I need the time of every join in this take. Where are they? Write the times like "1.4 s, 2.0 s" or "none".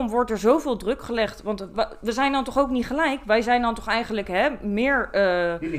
1.7 s